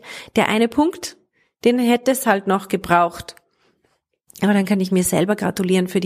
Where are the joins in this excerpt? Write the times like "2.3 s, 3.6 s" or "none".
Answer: none